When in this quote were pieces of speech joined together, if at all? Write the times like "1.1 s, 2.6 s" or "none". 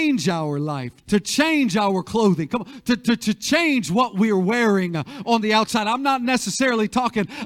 1.0 s